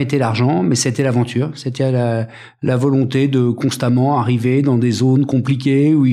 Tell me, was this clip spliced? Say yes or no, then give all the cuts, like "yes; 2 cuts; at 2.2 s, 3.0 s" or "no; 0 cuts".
no; 0 cuts